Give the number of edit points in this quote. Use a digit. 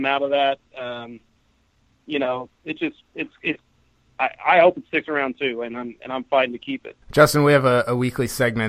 2